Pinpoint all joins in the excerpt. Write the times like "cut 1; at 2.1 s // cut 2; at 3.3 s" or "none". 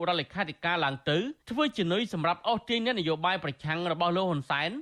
cut 1; at 1.4 s